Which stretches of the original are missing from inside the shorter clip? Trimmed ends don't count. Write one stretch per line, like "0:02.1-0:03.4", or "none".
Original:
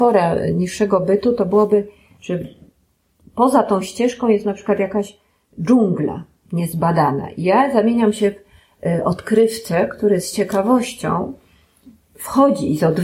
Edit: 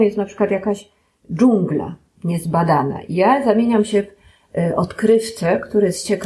none

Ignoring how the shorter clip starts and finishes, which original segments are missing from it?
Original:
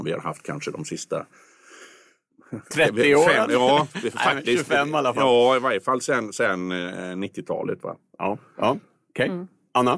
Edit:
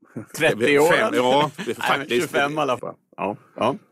0:05.2-0:07.8

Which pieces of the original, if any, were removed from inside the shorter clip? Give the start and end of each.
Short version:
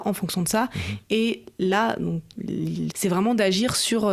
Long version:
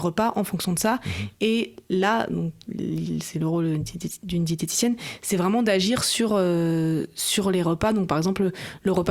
0:03.2-0:05.2

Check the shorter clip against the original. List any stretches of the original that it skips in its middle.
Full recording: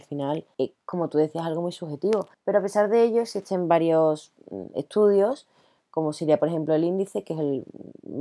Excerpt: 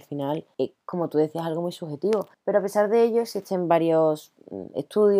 none

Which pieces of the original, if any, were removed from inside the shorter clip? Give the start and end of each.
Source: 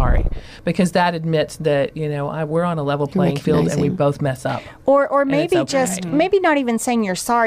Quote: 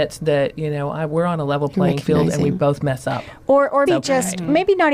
0:05.2-0:05.5

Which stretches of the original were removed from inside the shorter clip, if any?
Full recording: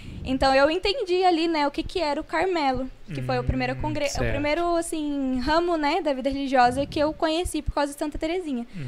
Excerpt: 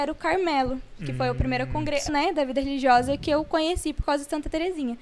0:04.2-0:05.8

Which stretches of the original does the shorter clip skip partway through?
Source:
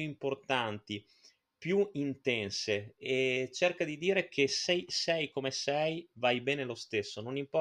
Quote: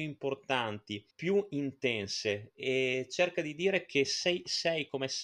0:01.1-0:01.5

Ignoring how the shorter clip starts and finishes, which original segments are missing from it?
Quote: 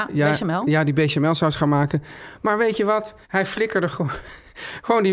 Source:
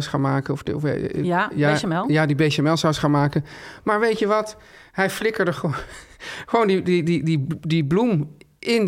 0:04.7-0:04.9

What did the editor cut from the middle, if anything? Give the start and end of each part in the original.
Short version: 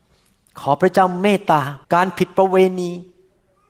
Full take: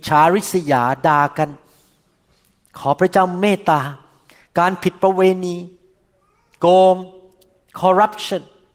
0:04.0-0:04.5

